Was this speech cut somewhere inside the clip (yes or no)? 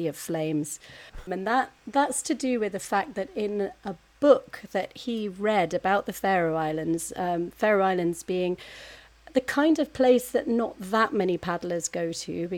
yes